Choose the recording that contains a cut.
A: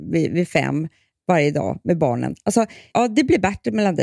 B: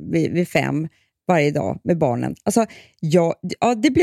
A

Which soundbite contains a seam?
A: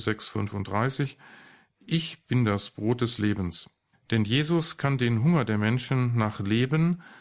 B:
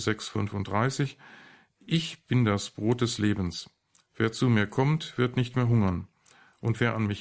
A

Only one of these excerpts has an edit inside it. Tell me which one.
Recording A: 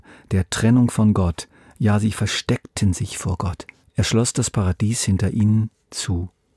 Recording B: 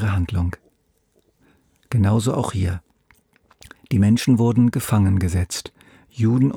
A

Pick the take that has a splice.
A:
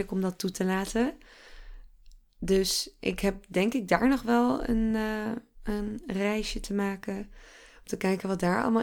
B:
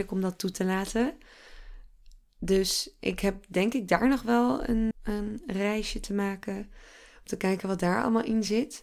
B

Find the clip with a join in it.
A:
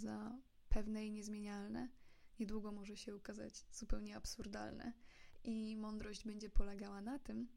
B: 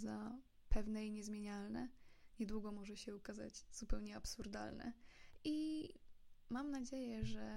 B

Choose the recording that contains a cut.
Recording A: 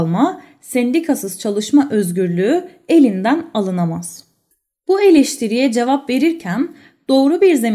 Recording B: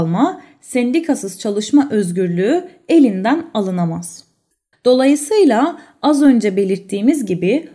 B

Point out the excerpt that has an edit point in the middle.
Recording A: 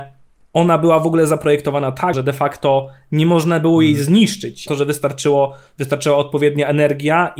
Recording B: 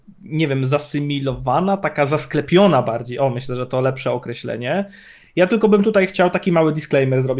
A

